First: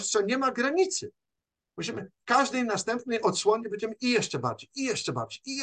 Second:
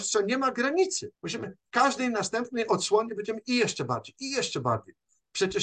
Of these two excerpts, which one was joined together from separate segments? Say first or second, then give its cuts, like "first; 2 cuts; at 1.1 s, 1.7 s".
second; 2 cuts; at 1.1 s, 4.1 s